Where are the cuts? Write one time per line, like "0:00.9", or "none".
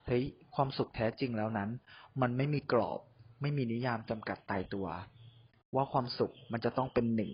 none

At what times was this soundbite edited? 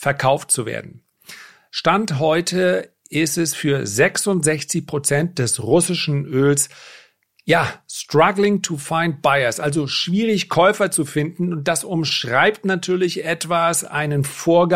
none

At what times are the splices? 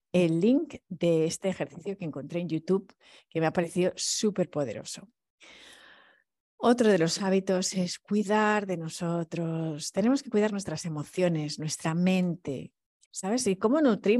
0:13.0

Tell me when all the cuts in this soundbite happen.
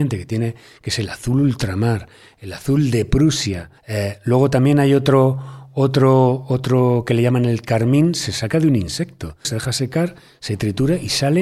0:03.8
0:09.4

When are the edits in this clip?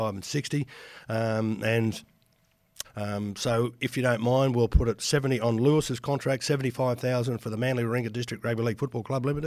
0:02.8

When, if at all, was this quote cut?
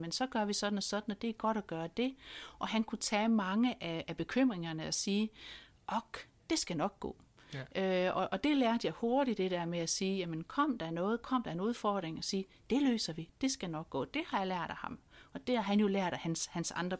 0:06.4

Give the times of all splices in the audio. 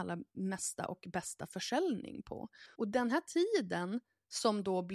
0:02.7

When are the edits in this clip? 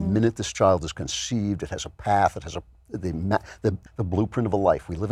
0:03.9

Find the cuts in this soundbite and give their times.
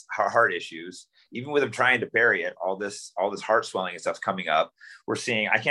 none

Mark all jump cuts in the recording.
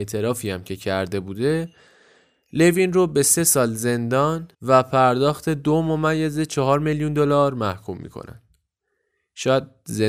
0:04.5

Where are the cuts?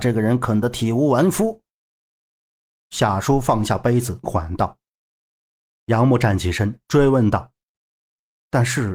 0:04.2

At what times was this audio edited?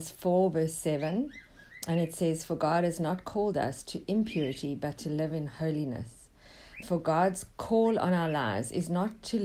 0:06.8

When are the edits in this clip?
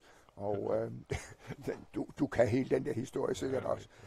none

